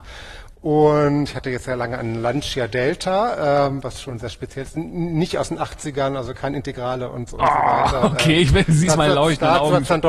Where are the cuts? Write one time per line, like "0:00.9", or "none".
none